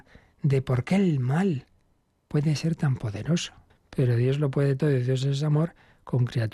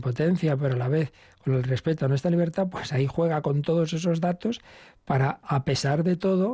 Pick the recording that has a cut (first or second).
first